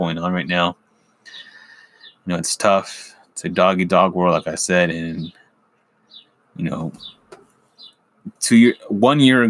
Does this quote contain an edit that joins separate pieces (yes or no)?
no